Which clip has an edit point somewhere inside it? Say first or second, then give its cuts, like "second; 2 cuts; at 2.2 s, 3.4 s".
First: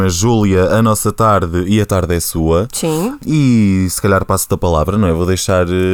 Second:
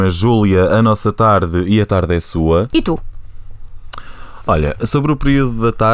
second; 1 cut; at 2.7 s